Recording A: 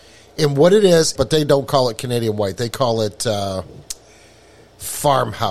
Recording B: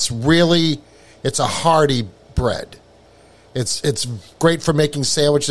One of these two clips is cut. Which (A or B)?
A